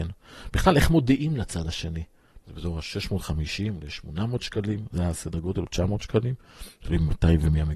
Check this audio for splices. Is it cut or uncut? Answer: cut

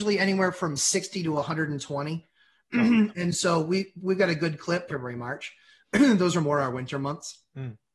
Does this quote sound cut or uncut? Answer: cut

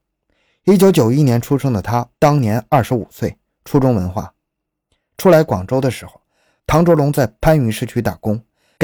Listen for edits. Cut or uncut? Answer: uncut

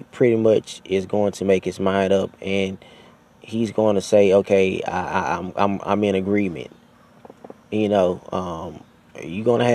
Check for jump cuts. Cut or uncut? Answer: uncut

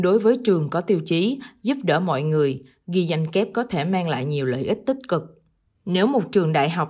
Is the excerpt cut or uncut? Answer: cut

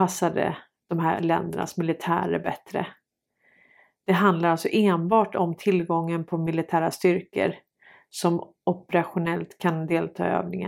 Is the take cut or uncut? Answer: uncut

